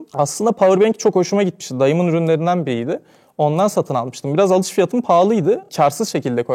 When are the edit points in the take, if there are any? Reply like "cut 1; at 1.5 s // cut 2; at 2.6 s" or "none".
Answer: none